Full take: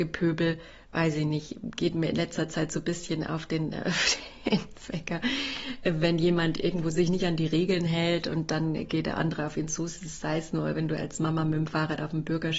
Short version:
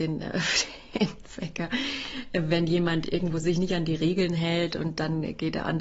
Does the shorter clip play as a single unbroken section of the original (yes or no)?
yes